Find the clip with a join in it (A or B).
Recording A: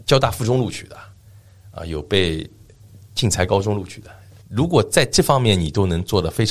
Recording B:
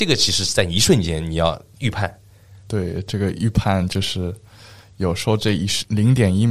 A